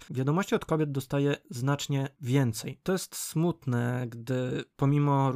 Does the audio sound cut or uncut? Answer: uncut